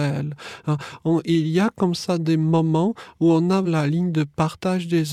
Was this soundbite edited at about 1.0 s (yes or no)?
no